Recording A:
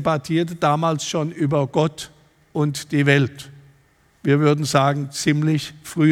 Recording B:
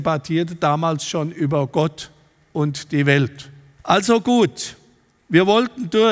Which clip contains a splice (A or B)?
B